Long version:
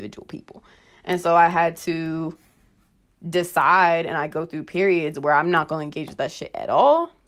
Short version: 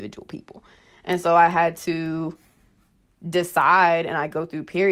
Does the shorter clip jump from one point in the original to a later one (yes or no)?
no